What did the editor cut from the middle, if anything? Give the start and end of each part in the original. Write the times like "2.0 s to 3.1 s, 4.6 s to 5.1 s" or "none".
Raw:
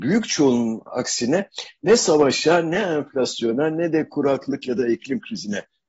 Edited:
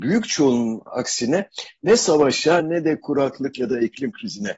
2.6 s to 3.7 s